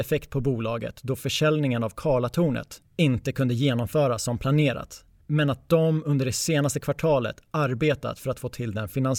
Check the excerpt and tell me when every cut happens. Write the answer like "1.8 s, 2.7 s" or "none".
none